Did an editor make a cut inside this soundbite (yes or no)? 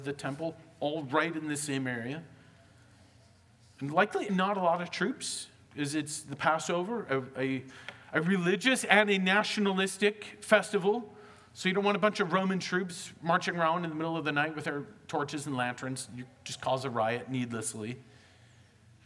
yes